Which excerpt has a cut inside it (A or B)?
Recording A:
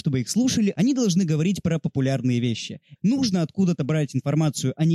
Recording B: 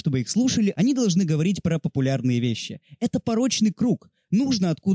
A